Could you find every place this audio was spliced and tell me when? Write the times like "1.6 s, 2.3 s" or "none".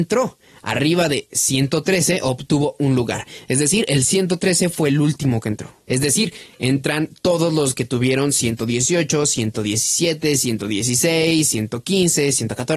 5.9 s